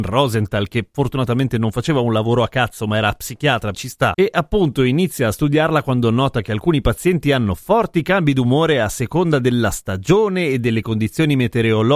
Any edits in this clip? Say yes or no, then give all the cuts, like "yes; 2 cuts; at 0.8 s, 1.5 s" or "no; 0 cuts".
yes; 1 cut; at 3.7 s